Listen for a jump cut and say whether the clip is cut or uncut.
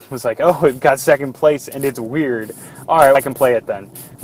cut